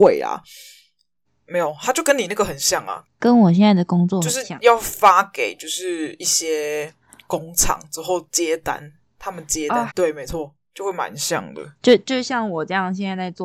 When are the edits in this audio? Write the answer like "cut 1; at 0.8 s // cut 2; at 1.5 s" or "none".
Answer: cut 1; at 1.3 s // cut 2; at 3.0 s // cut 3; at 9.9 s